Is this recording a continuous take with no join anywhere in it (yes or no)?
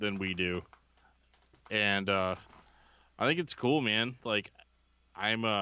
yes